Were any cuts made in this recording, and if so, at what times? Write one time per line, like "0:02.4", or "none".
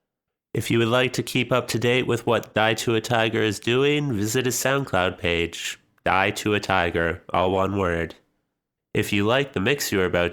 none